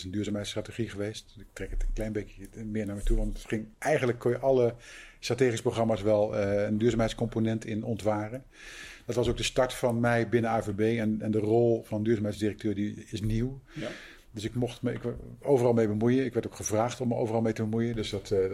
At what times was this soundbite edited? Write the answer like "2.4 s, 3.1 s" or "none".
3.7 s